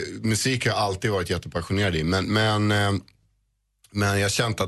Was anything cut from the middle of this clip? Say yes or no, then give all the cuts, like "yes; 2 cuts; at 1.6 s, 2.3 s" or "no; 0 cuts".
no; 0 cuts